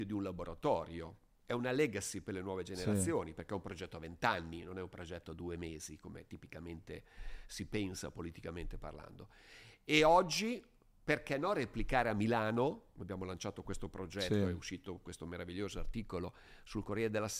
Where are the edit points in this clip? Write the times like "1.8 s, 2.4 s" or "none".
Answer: none